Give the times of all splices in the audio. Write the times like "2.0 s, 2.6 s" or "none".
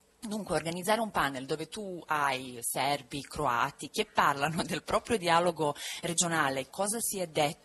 6.7 s